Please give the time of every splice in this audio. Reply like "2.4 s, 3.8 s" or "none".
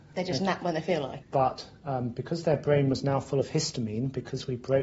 1.2 s

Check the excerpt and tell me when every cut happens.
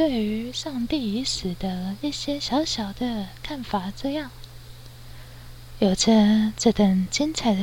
5.7 s

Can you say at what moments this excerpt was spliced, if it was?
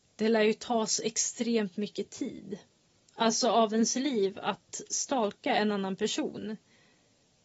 none

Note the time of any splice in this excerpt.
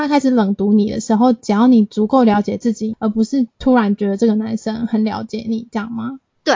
2.9 s

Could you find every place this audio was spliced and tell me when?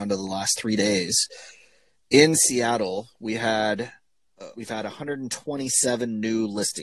4.5 s

